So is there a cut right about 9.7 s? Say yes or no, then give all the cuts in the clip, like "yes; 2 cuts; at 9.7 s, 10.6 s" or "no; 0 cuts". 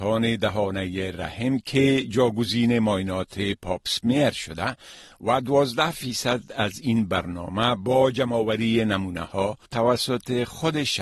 yes; 1 cut; at 9.7 s